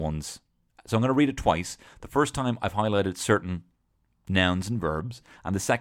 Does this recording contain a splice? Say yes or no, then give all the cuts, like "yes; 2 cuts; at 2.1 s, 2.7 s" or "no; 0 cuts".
no; 0 cuts